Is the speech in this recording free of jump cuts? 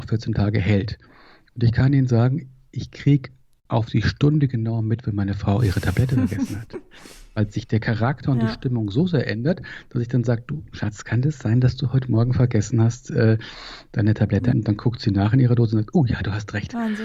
no; 1 cut; at 14.5 s

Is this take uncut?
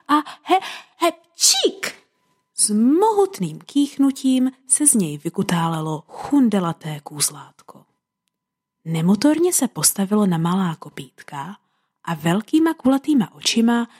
yes; 0 cuts

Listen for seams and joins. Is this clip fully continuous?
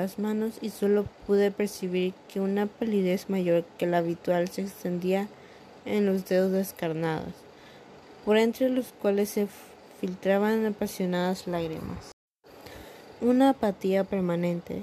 no; 1 cut; at 13.2 s

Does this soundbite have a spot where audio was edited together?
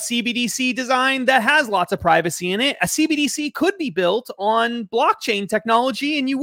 no; 0 cuts

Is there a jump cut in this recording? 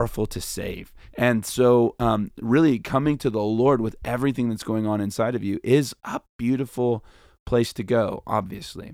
yes; 1 cut; at 1.1 s

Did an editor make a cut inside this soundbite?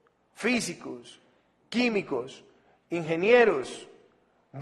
no; 0 cuts

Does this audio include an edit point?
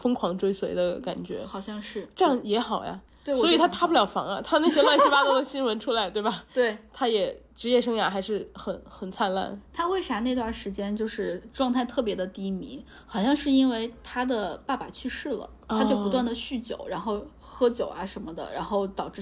no; 0 cuts

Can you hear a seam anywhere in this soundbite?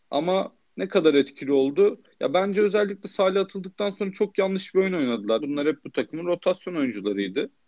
yes; 1 cut; at 5.4 s

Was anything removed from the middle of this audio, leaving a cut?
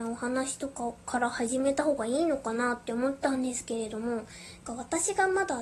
yes; 1 cut; at 4.6 s

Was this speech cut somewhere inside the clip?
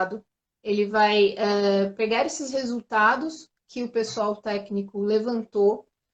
no; 0 cuts

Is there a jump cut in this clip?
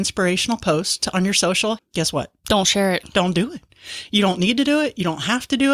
yes; 1 cut; at 1.8 s

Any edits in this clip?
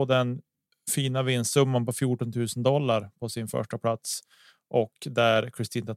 no; 0 cuts

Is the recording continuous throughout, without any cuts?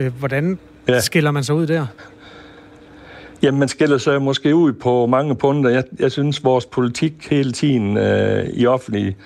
yes; 0 cuts

